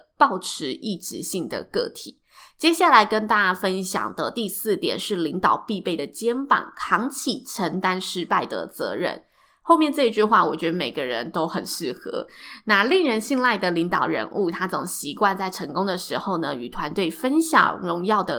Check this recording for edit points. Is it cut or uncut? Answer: uncut